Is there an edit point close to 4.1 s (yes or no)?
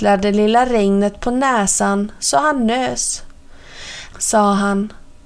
yes